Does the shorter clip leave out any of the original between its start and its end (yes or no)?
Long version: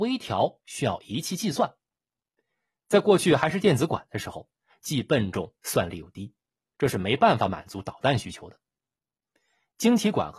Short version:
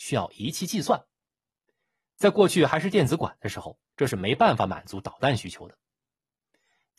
yes